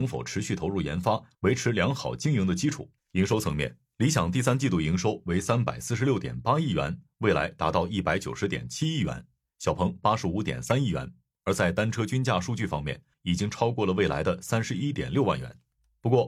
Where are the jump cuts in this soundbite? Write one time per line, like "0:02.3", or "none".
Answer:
0:03.0
0:13.1